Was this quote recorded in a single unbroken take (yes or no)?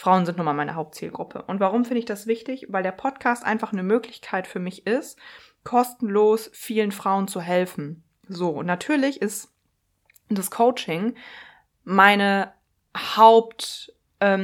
yes